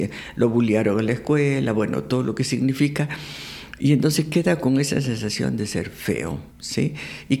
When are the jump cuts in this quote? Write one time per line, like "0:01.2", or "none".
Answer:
0:06.5